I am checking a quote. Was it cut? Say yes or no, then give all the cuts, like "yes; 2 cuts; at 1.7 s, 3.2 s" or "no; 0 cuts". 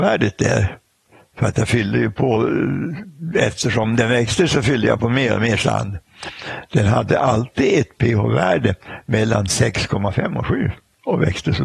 no; 0 cuts